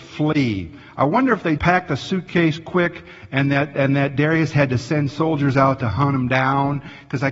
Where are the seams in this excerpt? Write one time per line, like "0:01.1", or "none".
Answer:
0:01.6